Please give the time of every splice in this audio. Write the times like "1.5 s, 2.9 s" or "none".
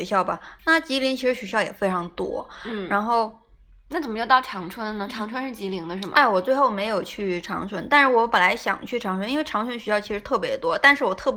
none